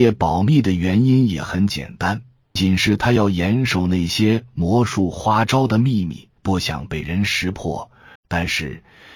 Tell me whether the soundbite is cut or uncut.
cut